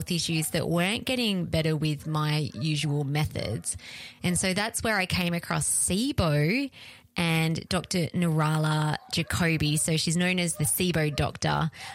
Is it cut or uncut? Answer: uncut